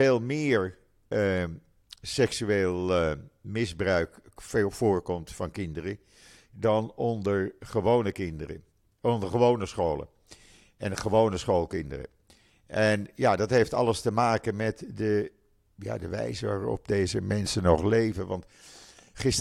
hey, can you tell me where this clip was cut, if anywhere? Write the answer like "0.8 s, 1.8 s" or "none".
none